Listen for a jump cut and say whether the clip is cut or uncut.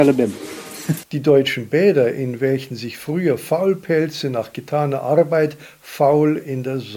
cut